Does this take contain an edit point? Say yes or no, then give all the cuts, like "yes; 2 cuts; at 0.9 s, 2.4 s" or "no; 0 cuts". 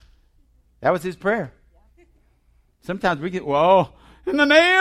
no; 0 cuts